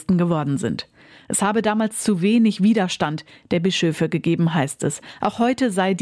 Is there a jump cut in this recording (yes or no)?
no